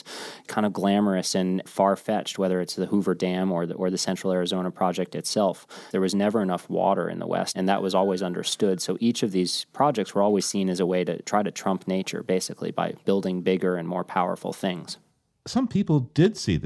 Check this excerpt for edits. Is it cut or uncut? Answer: cut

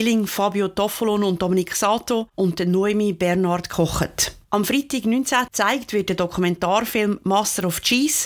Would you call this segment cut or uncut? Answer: cut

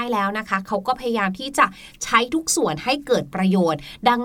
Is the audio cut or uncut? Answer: uncut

